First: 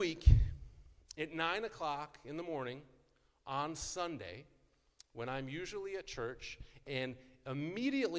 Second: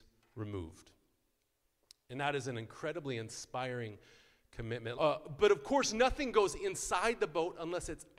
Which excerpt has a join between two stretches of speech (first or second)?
second